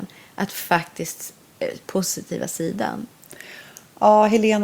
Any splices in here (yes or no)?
yes